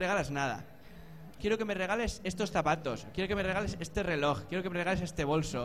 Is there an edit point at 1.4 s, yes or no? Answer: yes